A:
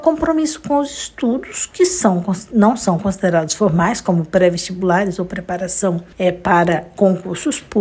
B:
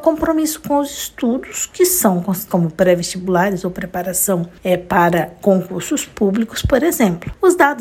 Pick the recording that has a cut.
B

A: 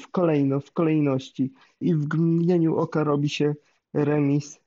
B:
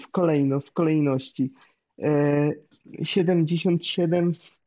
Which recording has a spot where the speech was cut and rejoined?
A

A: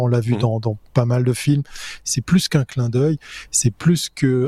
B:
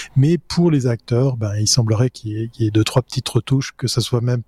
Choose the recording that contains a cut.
A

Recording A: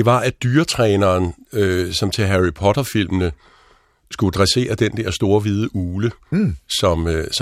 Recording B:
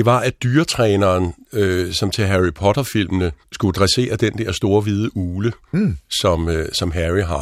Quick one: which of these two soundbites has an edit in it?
B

